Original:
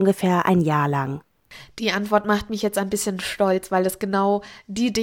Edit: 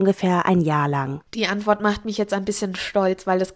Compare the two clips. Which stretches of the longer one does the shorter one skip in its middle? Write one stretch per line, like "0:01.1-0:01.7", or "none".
0:01.3-0:01.7